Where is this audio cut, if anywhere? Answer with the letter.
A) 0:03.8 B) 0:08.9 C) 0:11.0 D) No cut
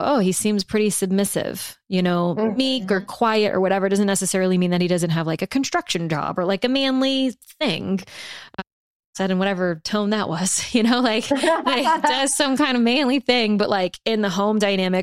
D